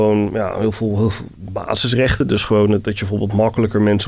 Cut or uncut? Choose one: uncut